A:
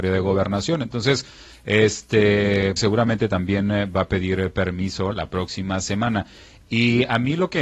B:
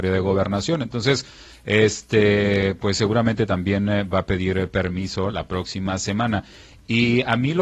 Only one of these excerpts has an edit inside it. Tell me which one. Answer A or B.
A